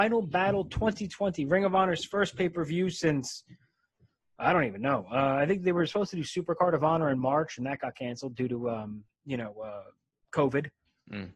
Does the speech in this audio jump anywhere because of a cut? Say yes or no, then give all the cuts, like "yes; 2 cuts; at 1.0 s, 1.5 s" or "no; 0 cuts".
no; 0 cuts